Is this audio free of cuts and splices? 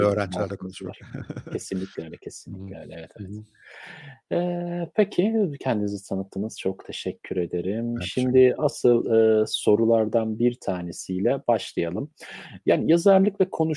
yes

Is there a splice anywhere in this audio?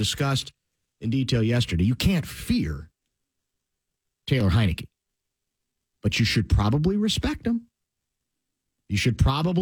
no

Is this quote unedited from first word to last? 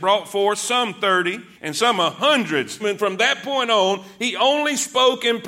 no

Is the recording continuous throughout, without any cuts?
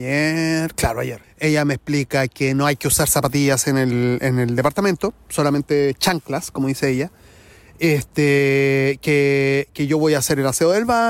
no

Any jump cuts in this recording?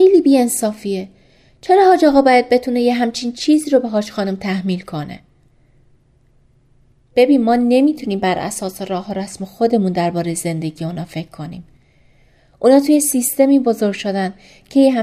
no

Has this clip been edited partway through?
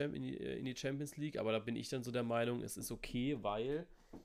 no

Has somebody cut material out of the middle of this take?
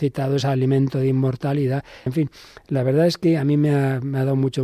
yes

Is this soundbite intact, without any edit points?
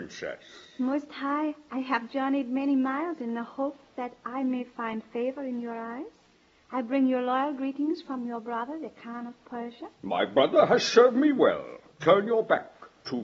yes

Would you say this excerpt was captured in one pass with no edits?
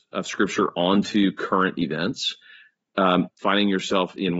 no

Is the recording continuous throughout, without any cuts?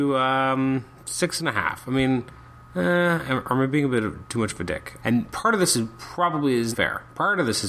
no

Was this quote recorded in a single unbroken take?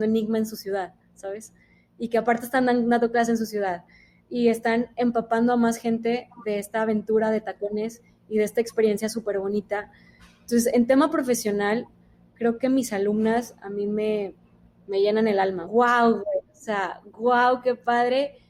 no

